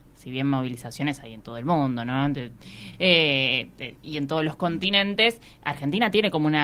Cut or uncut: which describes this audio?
uncut